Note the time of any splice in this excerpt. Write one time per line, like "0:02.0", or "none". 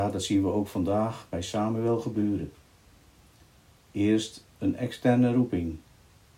none